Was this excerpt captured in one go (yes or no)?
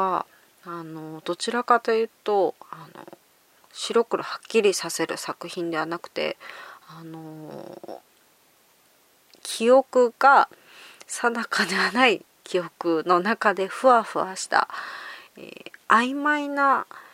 yes